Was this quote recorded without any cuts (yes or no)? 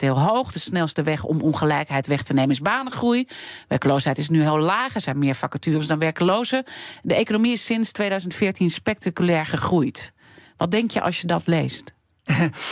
yes